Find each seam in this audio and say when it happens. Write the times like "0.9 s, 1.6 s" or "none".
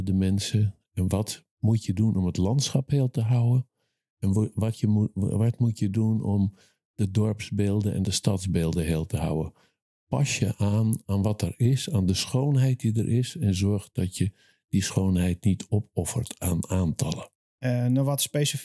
17.5 s